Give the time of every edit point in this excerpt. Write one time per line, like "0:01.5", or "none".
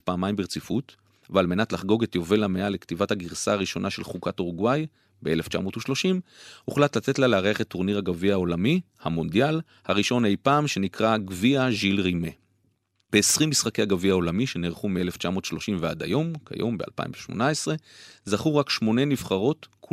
none